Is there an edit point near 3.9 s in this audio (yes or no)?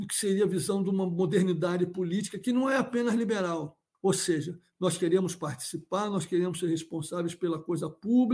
yes